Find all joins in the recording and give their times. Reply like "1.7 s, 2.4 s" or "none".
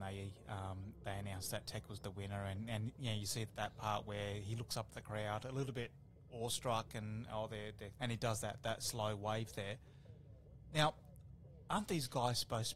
3.5 s, 8.0 s